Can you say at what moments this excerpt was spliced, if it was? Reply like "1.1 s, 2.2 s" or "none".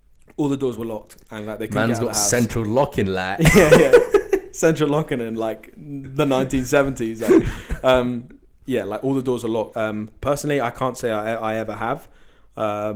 9.7 s